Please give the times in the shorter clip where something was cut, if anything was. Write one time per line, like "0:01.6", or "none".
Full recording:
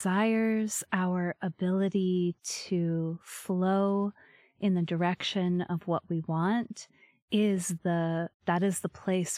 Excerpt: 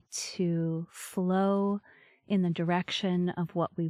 none